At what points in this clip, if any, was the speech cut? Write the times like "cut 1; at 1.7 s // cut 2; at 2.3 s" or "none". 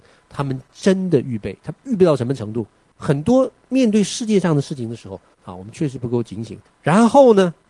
cut 1; at 2.9 s // cut 2; at 5.3 s // cut 3; at 6.7 s